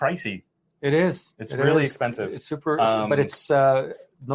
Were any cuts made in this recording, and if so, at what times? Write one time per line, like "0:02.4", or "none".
none